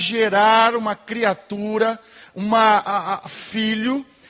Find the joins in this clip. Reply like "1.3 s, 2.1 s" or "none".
3.2 s